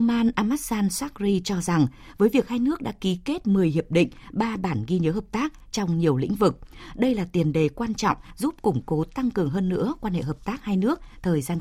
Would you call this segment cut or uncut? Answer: uncut